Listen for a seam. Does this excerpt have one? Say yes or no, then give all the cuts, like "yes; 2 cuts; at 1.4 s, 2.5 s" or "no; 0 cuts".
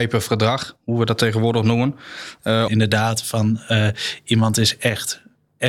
yes; 1 cut; at 2.7 s